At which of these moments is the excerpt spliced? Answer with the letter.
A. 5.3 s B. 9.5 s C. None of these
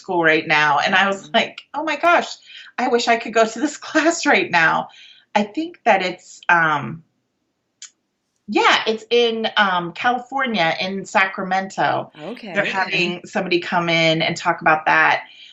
C